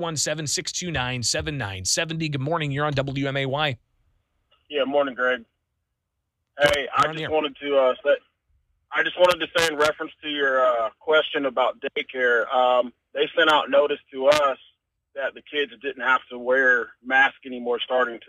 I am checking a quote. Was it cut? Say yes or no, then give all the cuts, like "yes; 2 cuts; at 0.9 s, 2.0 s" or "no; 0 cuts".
no; 0 cuts